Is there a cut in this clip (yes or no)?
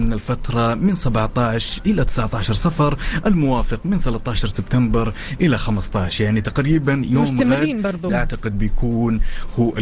yes